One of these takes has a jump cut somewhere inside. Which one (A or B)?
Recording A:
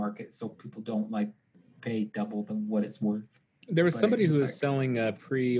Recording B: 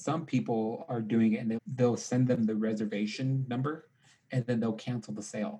B